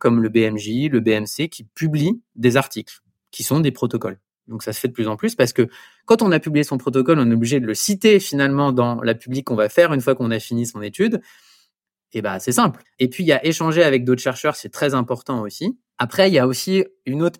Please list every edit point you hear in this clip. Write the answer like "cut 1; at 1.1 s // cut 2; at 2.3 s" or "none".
cut 1; at 12.8 s